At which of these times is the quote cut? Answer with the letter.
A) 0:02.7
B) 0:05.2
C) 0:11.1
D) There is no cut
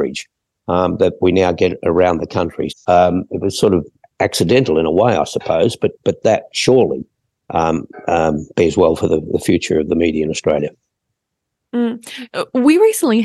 A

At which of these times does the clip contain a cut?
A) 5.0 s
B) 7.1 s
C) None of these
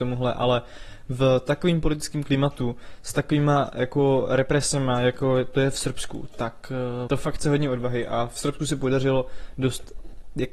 B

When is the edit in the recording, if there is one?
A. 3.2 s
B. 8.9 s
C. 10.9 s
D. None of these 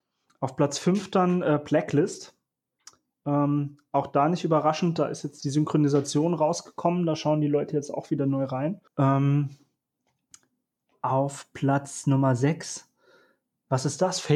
B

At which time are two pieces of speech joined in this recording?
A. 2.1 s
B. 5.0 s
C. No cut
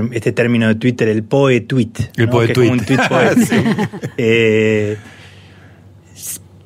C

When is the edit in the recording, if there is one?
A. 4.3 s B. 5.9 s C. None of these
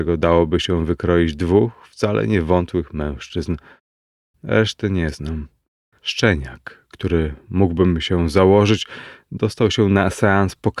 B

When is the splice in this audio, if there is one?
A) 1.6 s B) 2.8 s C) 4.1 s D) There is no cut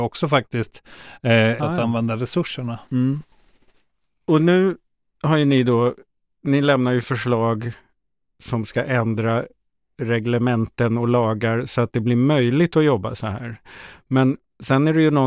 A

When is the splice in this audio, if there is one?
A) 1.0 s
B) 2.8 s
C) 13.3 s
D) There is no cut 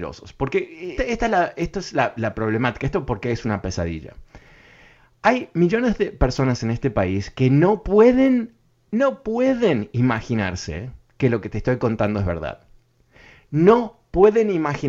A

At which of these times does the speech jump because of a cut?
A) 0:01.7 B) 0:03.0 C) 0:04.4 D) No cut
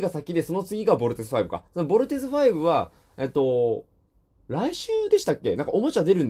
D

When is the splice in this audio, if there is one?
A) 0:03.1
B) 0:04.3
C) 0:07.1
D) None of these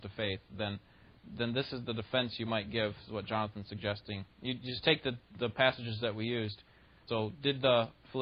C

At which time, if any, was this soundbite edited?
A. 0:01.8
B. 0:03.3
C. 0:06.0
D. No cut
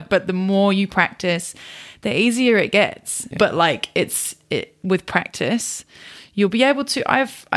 B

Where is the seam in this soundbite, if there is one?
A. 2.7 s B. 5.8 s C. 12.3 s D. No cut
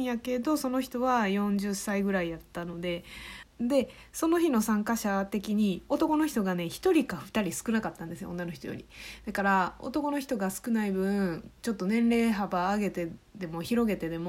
D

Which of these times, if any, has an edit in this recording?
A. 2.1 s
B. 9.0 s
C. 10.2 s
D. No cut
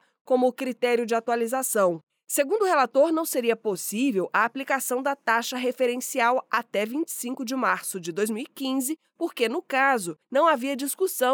D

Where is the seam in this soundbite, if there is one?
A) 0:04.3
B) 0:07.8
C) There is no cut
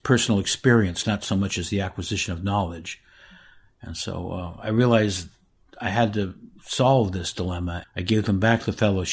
B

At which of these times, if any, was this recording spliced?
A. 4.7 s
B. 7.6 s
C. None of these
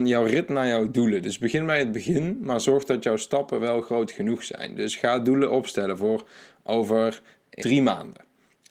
B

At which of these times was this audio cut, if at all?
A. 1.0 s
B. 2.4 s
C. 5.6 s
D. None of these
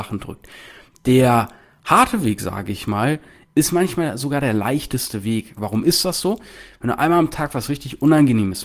C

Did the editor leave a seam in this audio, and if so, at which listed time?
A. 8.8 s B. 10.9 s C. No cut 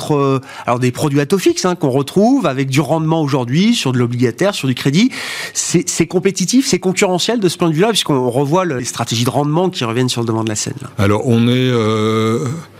A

